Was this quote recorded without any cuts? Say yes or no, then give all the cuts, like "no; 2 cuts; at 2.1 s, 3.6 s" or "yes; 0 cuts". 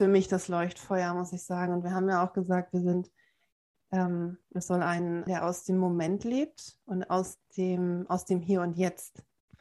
no; 1 cut; at 5.3 s